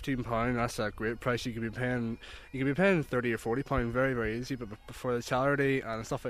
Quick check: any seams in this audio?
no; 0 cuts

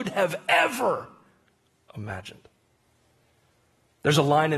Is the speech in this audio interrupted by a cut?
no; 0 cuts

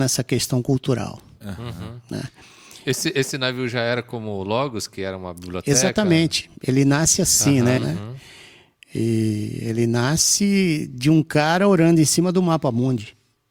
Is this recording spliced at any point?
yes; 1 cut; at 7.8 s

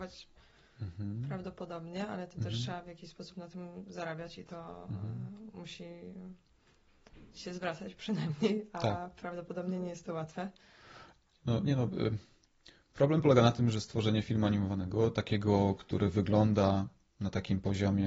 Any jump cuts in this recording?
no; 0 cuts

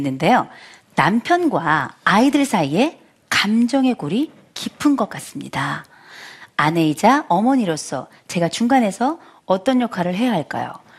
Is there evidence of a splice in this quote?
no; 0 cuts

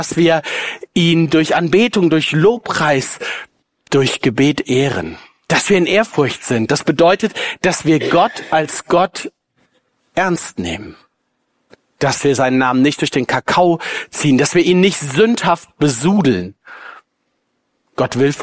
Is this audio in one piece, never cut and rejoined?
yes; 0 cuts

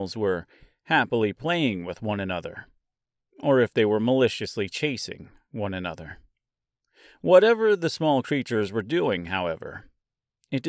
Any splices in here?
no; 0 cuts

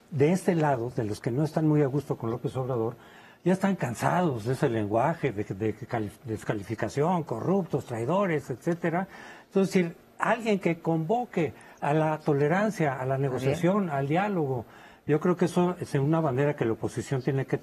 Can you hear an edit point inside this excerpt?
no; 0 cuts

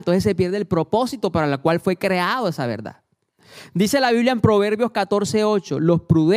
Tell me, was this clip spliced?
no; 0 cuts

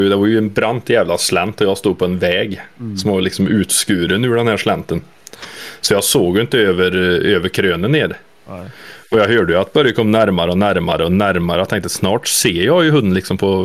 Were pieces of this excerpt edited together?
no; 0 cuts

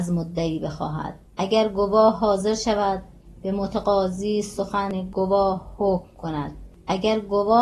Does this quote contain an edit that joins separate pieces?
yes; 1 cut; at 1.3 s

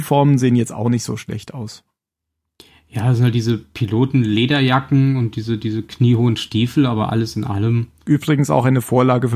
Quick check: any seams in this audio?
no; 0 cuts

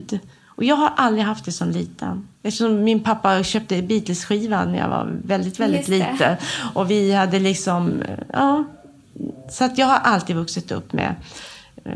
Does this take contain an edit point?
yes; 1 cut; at 2.4 s

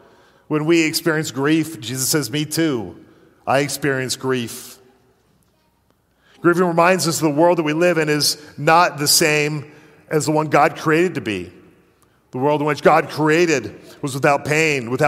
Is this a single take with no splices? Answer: yes; 0 cuts

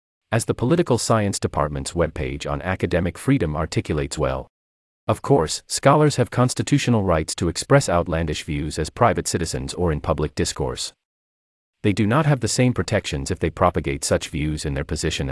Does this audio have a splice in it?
no; 0 cuts

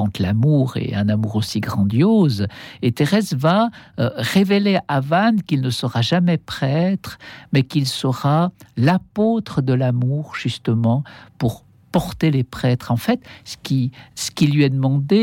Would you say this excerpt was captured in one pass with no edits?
yes; 0 cuts

